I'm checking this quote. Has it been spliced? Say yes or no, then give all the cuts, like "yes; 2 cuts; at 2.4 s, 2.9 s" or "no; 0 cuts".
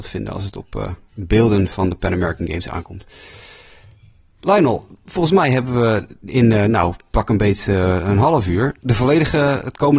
yes; 1 cut; at 8.8 s